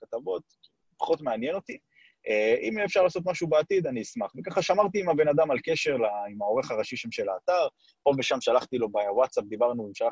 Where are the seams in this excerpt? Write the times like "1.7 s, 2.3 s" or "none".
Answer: none